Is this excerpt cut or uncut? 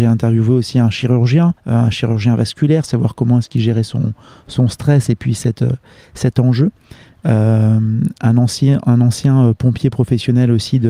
cut